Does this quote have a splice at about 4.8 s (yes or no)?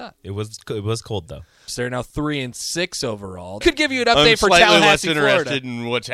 no